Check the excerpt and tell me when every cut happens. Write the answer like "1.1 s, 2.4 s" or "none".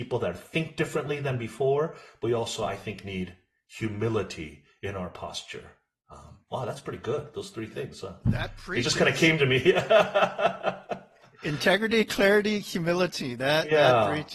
none

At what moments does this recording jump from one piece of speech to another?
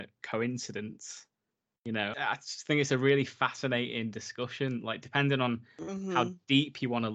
2.1 s

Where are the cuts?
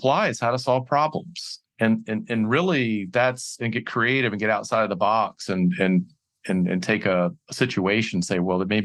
none

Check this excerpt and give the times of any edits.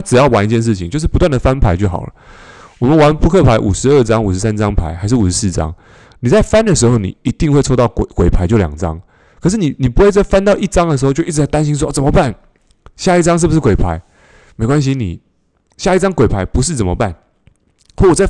none

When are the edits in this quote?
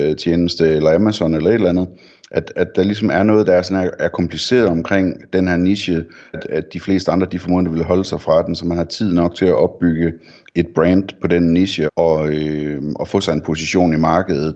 6.3 s, 11.9 s

